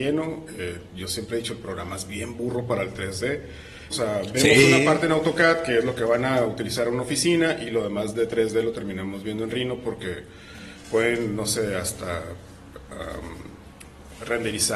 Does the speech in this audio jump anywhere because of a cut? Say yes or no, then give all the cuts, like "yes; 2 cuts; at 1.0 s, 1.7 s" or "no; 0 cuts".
yes; 1 cut; at 3.9 s